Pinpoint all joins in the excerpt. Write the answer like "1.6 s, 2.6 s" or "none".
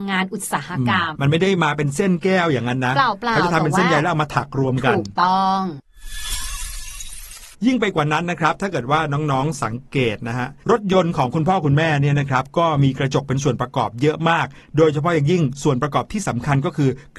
1.2 s, 7.5 s